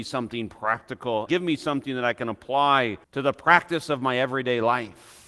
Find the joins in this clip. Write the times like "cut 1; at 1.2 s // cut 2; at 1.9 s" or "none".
cut 1; at 1.3 s // cut 2; at 3.0 s